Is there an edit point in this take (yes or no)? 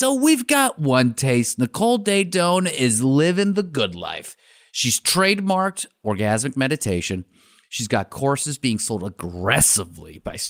no